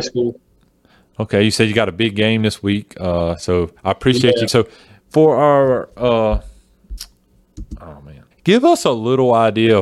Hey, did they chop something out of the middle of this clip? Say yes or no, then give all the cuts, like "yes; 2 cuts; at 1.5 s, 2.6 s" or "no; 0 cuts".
yes; 2 cuts; at 4.5 s, 8.3 s